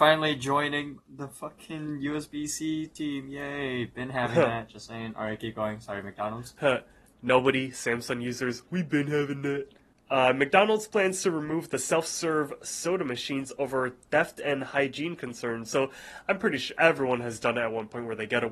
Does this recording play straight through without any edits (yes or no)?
yes